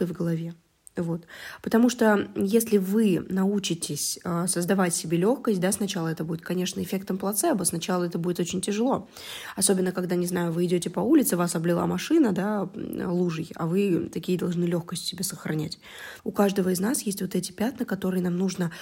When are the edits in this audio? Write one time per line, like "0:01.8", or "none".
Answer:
0:16.2